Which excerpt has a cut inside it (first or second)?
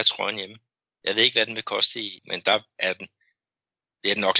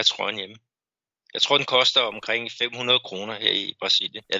first